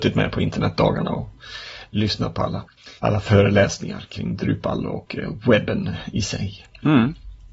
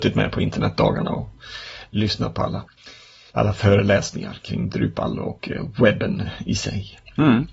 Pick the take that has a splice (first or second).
first